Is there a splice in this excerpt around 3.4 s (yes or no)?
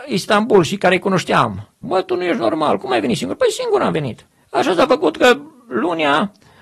no